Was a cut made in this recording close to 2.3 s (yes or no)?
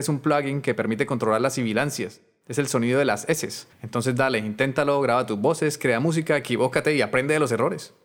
no